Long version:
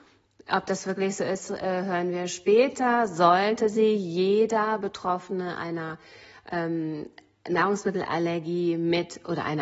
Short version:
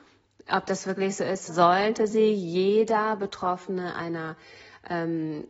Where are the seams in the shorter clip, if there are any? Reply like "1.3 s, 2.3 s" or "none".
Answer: 1.5 s